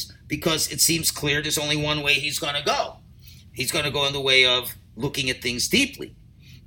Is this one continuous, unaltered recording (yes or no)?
yes